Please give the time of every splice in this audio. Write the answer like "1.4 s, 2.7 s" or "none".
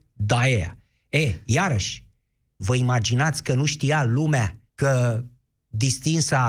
2.6 s, 4.7 s